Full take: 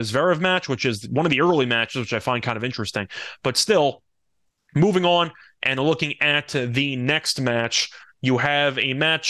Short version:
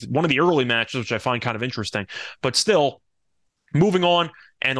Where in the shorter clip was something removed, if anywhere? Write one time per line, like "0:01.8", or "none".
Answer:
none